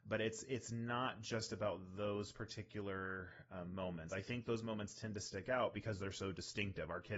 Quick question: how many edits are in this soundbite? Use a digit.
0